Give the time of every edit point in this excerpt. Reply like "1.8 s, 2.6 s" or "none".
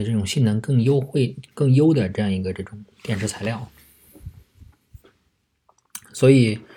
1.5 s